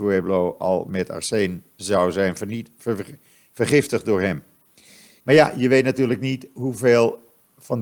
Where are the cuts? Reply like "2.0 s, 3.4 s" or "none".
5.2 s